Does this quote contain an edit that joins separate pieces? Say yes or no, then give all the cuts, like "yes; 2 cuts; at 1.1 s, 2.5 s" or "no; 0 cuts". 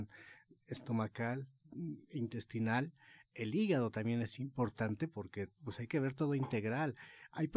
no; 0 cuts